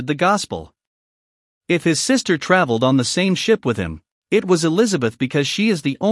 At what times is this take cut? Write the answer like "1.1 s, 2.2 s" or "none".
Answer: 1.6 s